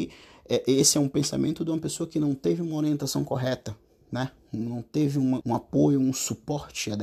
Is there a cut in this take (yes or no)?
yes